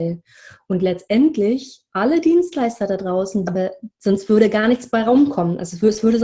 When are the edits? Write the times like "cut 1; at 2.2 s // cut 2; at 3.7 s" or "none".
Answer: cut 1; at 3.4 s